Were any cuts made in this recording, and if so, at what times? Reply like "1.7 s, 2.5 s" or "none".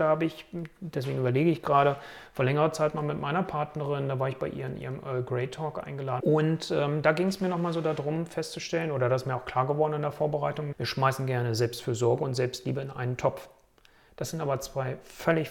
6.2 s, 10.7 s